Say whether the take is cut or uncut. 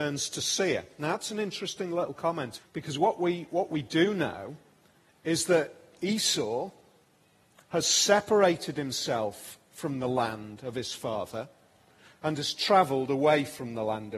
cut